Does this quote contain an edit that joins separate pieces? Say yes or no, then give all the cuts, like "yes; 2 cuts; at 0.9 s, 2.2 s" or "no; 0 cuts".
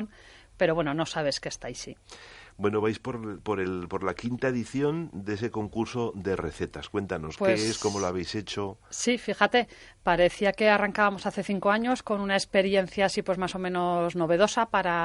no; 0 cuts